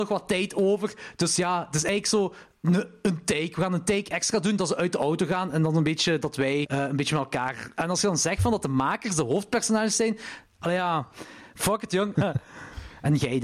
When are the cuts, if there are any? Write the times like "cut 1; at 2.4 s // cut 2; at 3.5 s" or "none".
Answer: cut 1; at 6.6 s // cut 2; at 12.1 s